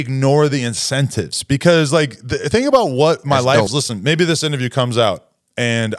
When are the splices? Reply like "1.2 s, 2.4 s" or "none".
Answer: 3.7 s